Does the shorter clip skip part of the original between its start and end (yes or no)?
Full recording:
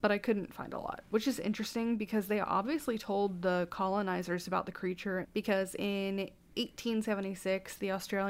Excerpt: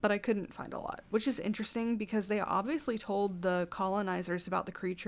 no